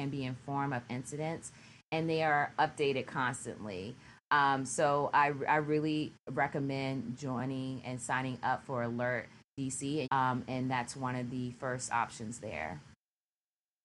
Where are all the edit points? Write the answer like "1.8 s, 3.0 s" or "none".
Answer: 10.0 s